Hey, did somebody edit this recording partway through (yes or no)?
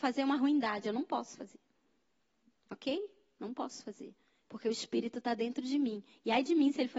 no